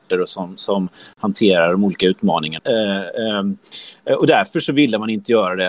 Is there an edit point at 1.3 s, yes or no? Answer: no